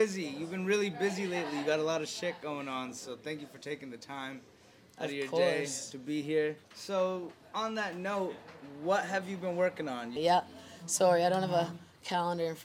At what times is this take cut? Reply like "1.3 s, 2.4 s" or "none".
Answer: 6.6 s, 10.2 s